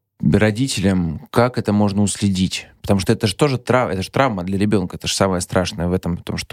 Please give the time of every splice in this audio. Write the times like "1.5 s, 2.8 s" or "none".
none